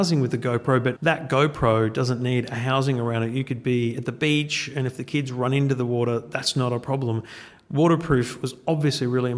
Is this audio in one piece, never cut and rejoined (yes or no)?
no